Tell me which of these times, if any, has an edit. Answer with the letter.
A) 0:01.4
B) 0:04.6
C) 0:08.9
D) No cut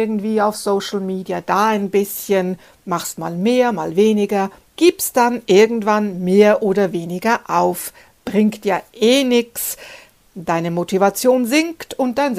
B